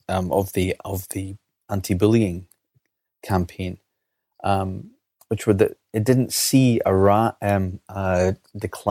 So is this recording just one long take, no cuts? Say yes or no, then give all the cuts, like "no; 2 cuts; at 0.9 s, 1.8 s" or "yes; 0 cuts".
yes; 0 cuts